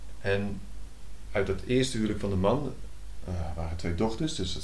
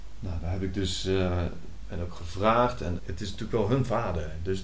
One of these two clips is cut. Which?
second; 2 cuts; at 1.8 s, 3.0 s

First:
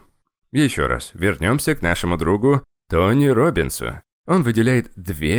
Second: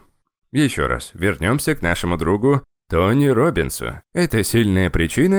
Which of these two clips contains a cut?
second; 1 cut; at 4.1 s

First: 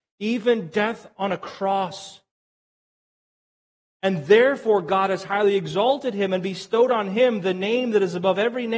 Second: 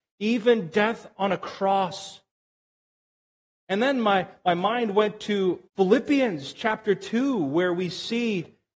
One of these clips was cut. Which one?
second; 2 cuts; at 3.6 s, 5.7 s

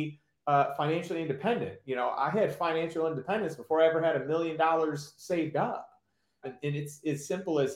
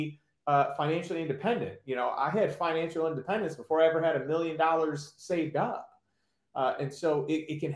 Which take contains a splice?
first; 1 cut; at 6.4 s

